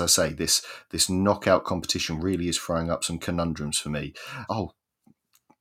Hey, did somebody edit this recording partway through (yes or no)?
yes